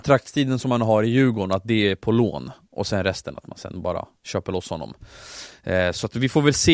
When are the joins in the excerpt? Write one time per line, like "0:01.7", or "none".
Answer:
none